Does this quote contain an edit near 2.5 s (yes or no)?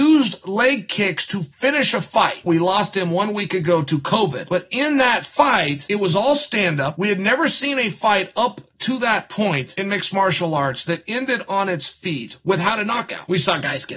yes